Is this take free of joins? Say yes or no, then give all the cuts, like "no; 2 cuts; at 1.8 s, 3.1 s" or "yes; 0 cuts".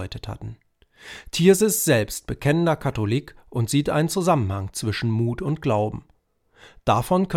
yes; 0 cuts